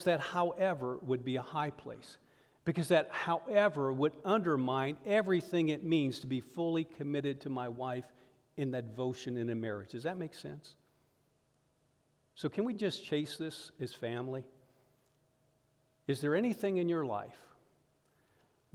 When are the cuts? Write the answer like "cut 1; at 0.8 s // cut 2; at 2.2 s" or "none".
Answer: none